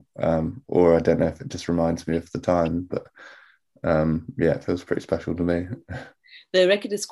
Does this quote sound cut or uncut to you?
uncut